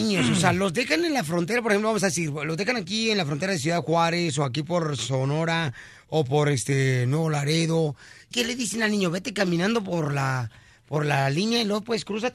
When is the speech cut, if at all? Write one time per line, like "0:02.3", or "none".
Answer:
0:08.3